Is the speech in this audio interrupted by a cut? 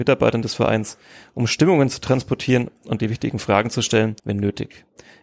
yes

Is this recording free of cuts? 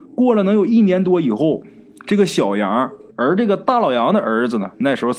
no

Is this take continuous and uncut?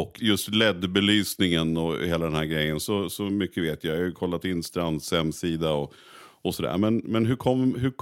yes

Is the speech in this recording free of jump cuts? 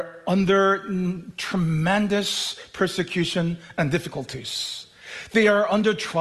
yes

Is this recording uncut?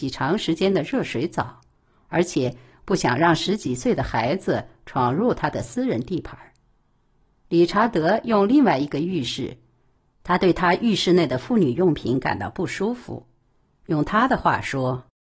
yes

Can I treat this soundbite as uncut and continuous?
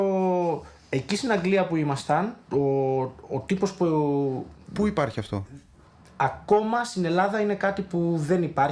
no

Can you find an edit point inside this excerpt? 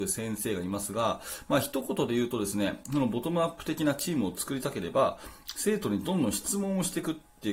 no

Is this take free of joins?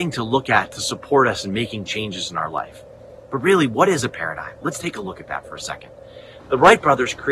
no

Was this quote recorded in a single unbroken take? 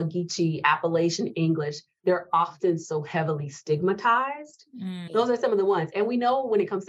no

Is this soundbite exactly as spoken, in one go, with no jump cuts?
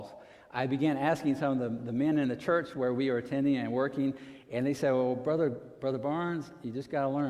yes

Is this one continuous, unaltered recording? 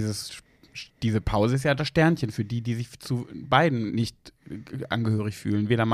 yes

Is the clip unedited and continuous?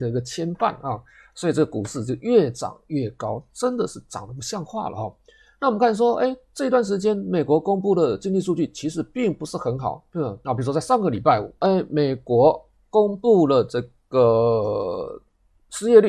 no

